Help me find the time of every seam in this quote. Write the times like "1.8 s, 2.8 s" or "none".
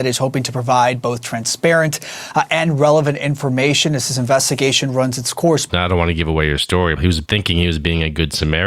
5.7 s, 7.0 s